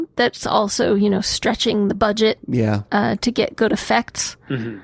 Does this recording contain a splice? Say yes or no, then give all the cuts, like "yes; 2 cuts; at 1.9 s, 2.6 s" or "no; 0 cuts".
no; 0 cuts